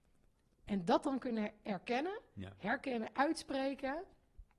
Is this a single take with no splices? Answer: yes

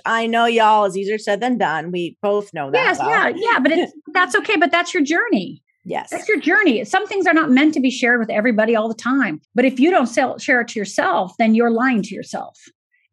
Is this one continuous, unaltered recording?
no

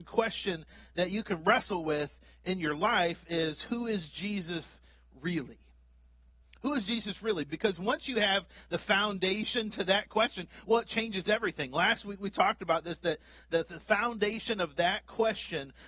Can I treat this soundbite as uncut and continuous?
yes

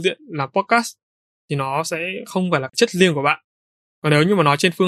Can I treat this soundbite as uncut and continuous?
yes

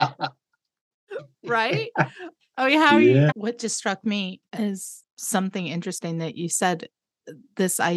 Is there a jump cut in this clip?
yes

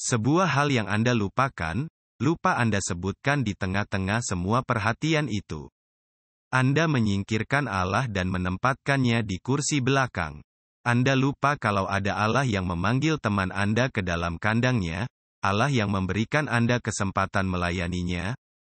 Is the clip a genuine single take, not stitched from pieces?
yes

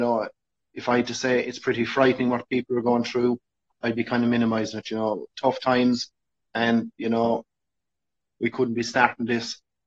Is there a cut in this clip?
yes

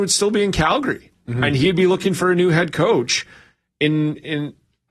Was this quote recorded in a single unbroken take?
yes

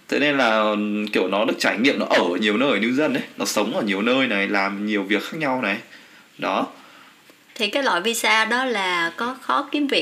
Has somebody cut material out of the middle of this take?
no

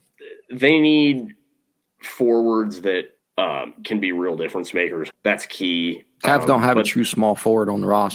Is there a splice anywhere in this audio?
yes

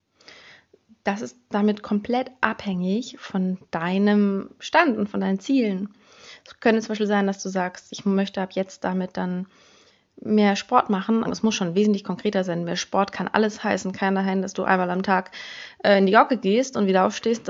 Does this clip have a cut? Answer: yes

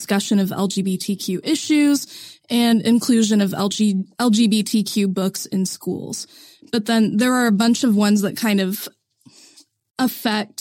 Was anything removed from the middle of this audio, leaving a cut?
no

